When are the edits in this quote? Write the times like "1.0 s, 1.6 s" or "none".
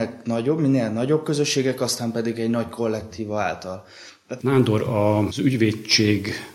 4.4 s